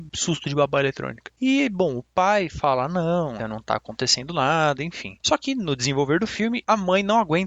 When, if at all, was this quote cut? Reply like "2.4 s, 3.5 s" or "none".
3.4 s